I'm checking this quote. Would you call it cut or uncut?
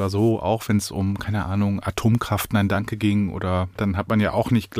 cut